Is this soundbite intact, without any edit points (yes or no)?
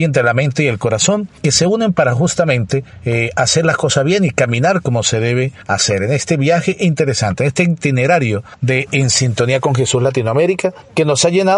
yes